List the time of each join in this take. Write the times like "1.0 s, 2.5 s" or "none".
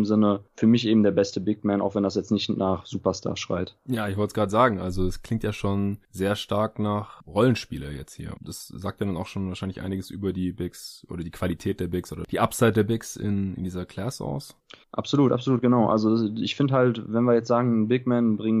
8.4 s